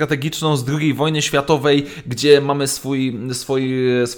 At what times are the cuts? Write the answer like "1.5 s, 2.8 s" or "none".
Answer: none